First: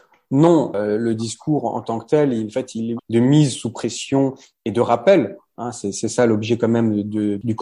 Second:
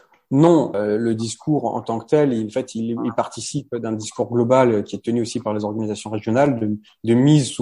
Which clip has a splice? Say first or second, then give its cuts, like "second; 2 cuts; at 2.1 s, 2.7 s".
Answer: first; 1 cut; at 3.0 s